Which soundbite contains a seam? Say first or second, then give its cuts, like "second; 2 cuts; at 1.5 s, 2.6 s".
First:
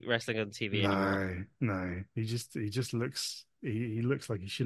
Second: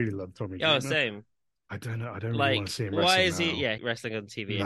second; 1 cut; at 3.8 s